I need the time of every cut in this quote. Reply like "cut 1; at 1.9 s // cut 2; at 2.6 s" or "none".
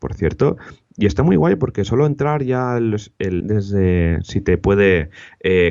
cut 1; at 3.4 s